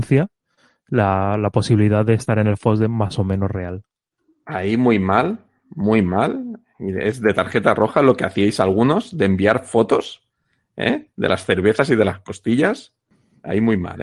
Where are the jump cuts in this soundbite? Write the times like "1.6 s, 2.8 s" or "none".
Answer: none